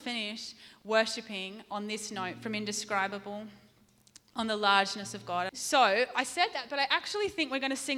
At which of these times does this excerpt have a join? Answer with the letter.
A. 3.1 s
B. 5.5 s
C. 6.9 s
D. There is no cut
B